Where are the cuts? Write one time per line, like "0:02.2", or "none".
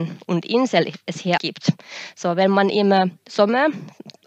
0:01.4